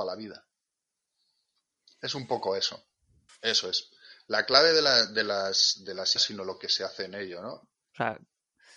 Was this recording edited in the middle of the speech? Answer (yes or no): yes